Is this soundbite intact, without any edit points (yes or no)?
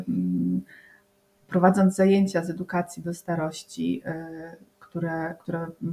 yes